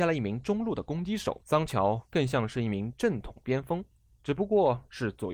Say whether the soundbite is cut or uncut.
cut